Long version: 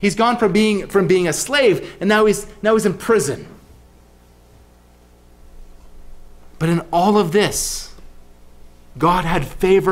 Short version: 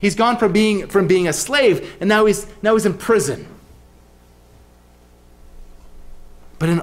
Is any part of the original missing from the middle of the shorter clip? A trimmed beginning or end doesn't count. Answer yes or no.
no